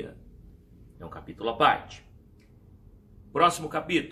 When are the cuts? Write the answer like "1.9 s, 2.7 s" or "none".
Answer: 0.9 s